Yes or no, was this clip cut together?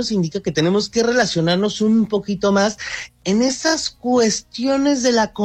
no